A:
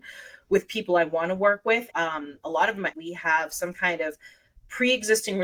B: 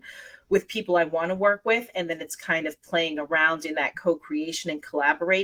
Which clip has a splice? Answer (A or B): A